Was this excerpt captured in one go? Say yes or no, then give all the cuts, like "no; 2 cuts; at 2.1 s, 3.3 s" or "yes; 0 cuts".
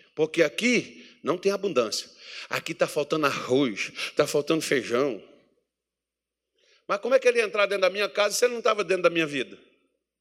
yes; 0 cuts